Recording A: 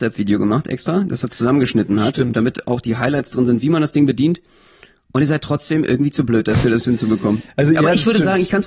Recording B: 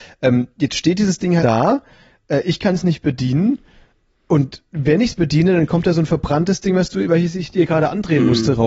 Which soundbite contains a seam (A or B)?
B